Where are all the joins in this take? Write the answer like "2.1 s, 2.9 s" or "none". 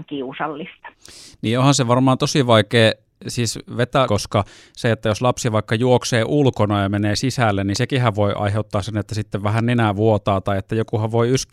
4.1 s